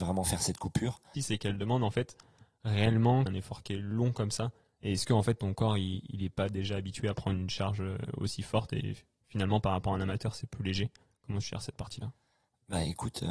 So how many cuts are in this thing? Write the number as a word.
two